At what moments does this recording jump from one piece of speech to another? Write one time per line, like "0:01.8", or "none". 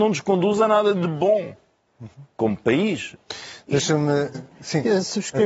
0:04.3